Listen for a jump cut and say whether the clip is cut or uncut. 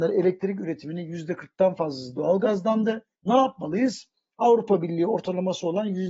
cut